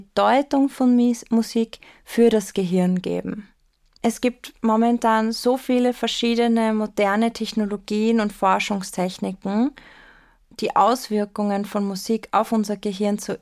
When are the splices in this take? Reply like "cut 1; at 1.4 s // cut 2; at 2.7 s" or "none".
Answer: cut 1; at 4.0 s // cut 2; at 10.4 s